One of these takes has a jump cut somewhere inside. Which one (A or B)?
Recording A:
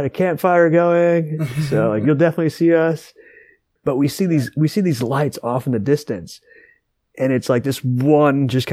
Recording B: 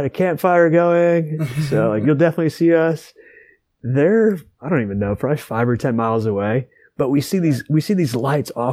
A